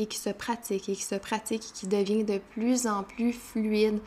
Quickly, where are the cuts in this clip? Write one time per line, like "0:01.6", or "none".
none